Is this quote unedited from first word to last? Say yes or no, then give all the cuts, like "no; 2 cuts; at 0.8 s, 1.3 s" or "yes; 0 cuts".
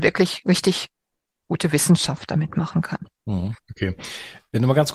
yes; 0 cuts